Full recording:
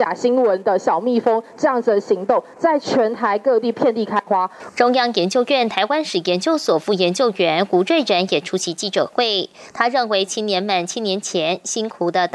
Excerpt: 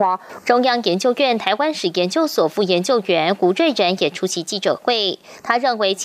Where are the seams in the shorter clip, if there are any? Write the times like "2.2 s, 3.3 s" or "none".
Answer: none